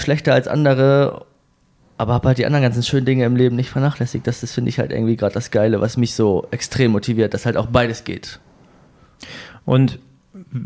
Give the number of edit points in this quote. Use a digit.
0